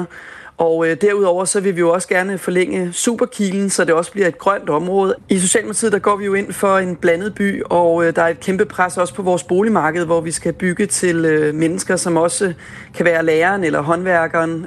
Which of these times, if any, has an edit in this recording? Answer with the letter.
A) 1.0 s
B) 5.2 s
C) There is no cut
B